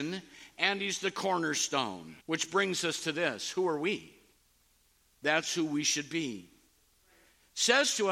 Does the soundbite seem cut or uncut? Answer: cut